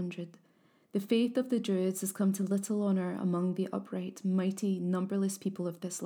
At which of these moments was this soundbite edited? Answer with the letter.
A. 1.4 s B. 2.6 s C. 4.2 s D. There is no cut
D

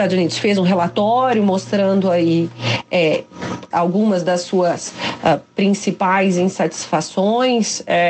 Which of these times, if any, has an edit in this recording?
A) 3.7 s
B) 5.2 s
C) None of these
A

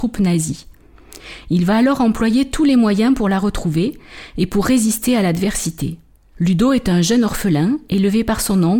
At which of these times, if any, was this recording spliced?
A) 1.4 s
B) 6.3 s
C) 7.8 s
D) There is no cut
B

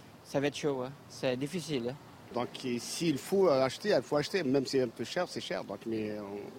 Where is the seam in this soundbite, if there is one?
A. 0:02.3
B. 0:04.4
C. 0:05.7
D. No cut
A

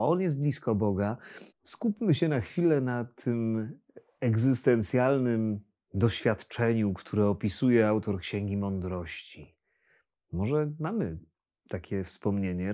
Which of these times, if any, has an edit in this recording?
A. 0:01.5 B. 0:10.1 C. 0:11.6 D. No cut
A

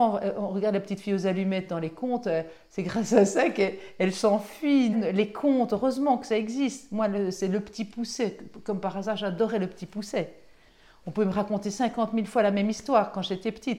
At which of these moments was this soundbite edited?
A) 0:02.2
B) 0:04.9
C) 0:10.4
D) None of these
B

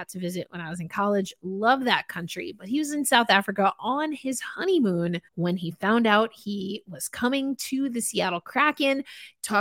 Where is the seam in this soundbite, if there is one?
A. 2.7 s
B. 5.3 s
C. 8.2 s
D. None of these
B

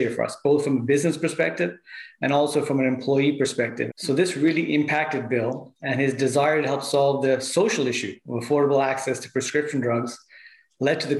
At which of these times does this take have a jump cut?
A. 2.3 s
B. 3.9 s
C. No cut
B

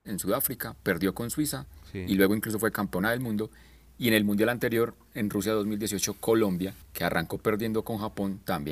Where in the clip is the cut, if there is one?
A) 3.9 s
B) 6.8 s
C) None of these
B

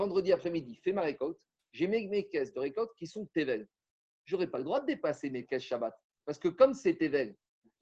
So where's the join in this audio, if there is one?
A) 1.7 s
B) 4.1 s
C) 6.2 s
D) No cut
D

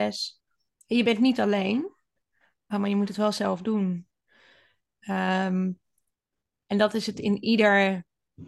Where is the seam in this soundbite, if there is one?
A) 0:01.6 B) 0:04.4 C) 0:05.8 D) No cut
D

